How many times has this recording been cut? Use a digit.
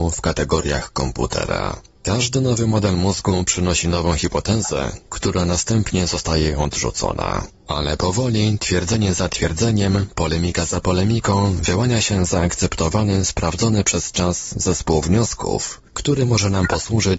0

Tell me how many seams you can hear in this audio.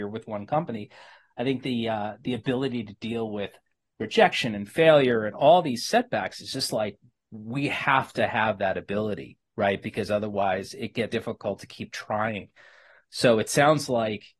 1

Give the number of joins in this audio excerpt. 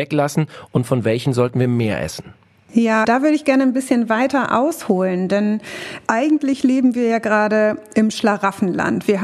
1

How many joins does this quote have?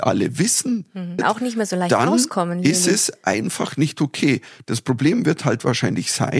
1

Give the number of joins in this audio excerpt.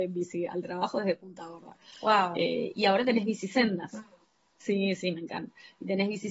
0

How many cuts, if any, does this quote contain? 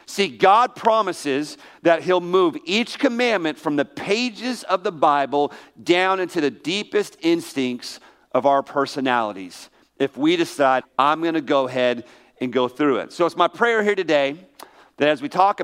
1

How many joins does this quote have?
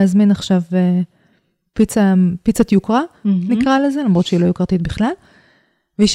0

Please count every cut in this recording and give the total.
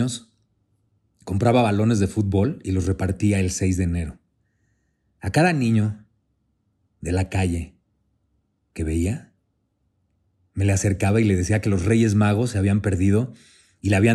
0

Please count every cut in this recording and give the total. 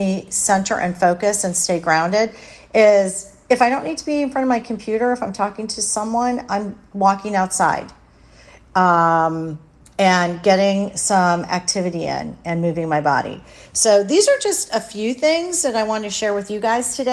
0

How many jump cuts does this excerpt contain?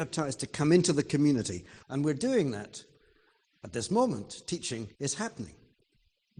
2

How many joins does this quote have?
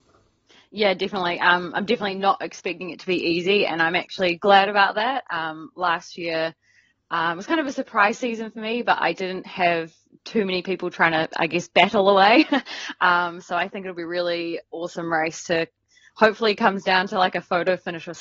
0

